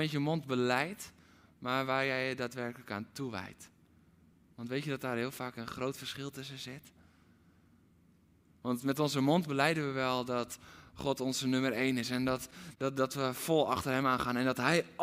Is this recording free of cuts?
yes; 0 cuts

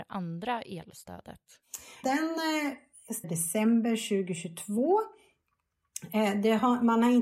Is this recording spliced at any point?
yes; 2 cuts; at 2.0 s, 3.2 s

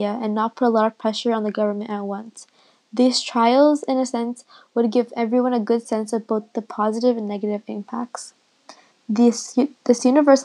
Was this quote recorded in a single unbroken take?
yes; 0 cuts

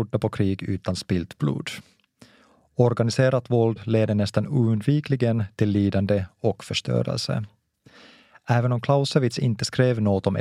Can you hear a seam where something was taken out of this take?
no; 0 cuts

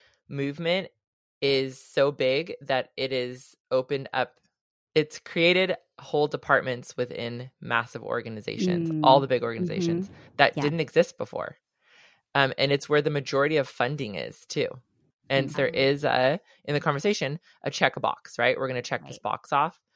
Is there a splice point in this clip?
yes; 1 cut; at 15.5 s

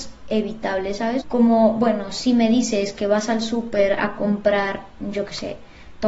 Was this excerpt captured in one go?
no; 1 cut; at 1.2 s

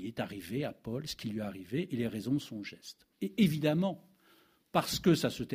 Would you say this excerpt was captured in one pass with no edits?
no; 1 cut; at 3.1 s

